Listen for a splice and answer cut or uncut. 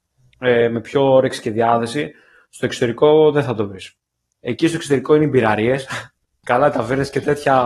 cut